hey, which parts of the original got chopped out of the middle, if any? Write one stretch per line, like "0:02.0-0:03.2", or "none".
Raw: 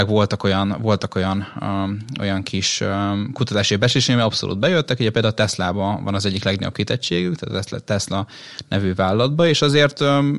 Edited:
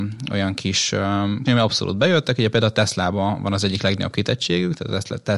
0:03.3-0:04.1